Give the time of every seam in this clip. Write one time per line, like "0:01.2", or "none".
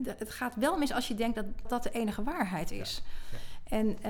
0:01.6